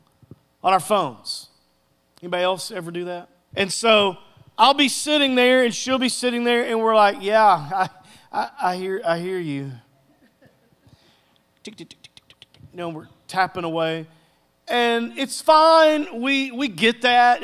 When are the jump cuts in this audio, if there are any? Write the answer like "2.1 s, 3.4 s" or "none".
3.5 s